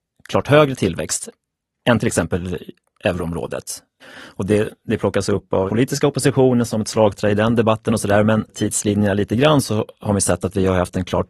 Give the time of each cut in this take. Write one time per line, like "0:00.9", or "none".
0:04.0
0:05.7
0:08.5